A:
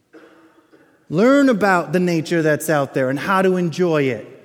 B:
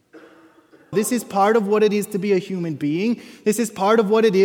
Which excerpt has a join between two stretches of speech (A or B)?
B